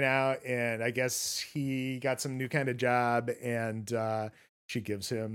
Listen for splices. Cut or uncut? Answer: uncut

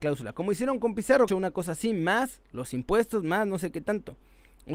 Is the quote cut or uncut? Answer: cut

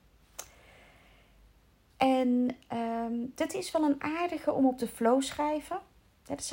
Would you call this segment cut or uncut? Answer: cut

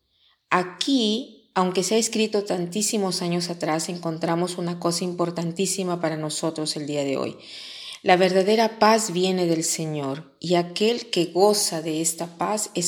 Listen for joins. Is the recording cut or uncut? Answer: uncut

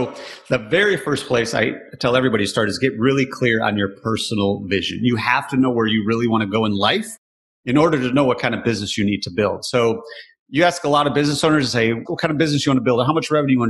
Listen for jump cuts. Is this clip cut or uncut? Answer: cut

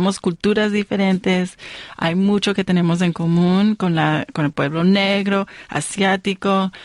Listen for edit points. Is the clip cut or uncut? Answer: uncut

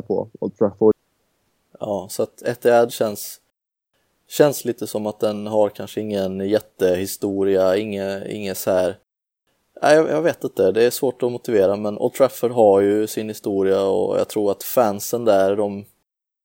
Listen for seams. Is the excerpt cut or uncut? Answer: uncut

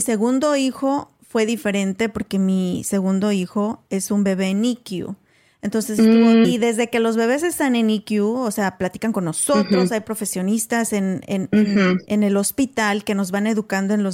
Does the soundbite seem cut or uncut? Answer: cut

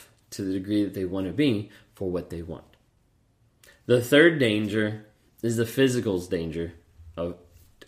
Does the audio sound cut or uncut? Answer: uncut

